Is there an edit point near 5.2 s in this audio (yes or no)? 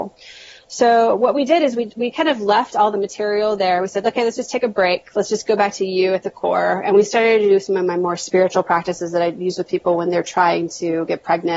no